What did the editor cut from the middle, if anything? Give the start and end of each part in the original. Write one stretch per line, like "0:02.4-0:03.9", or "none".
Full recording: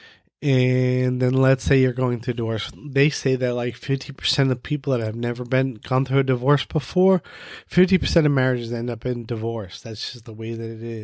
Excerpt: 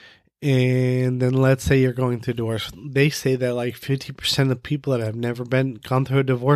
none